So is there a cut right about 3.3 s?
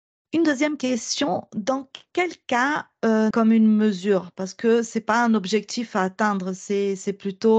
yes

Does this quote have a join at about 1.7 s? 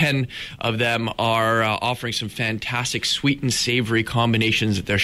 no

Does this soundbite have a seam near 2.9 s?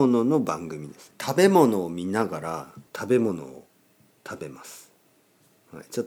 yes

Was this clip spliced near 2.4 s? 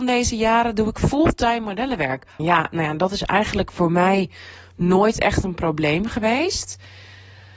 yes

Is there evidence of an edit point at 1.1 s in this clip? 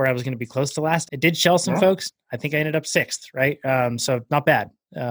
yes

